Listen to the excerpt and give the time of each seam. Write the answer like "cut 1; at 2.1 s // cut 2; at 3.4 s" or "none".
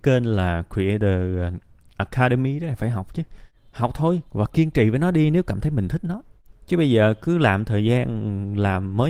cut 1; at 4.3 s